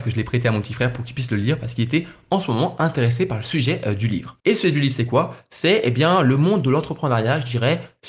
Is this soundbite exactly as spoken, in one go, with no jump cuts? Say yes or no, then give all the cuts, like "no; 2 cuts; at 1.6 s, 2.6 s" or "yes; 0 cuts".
no; 1 cut; at 4.4 s